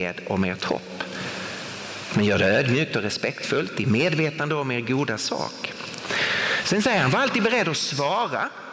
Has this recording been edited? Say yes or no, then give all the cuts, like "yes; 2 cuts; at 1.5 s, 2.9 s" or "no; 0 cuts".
yes; 1 cut; at 6.6 s